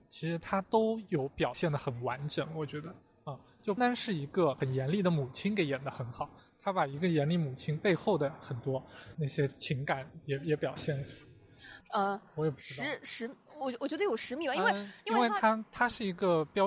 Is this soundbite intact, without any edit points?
no; 2 cuts; at 3.8 s, 11.8 s

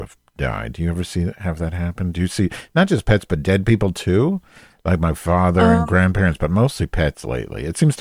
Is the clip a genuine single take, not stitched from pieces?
yes; 0 cuts

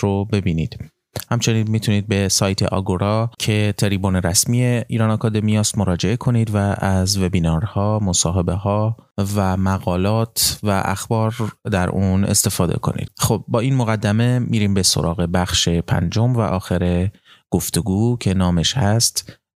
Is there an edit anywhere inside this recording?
yes; 1 cut; at 13.1 s

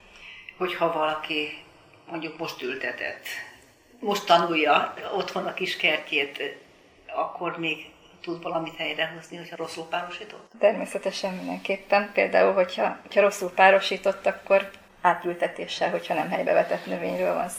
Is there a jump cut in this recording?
no; 0 cuts

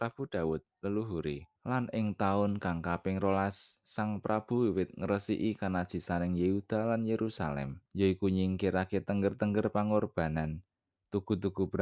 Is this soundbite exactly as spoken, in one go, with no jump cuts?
no; 2 cuts; at 1.6 s, 7.9 s

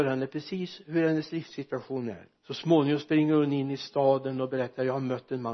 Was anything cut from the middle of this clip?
yes; 1 cut; at 2.4 s

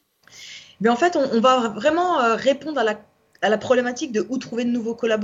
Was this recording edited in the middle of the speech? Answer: no; 0 cuts

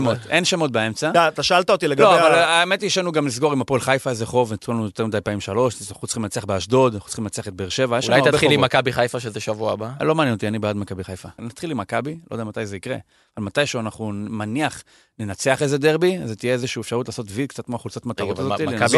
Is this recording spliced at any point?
yes; 1 cut; at 11.4 s

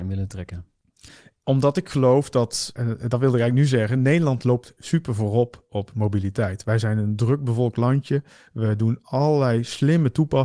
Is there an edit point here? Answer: yes; 1 cut; at 2.7 s

